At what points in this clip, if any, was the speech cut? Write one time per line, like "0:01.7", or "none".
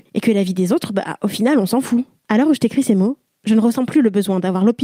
none